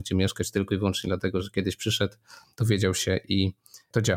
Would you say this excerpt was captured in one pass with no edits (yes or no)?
yes